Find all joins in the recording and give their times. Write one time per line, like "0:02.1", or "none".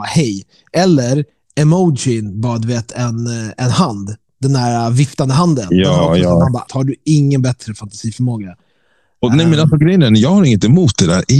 0:06.7